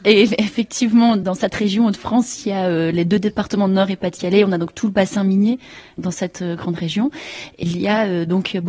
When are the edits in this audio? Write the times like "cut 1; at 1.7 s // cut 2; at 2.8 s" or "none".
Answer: none